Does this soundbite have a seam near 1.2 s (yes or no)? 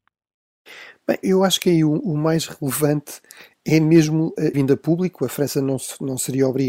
yes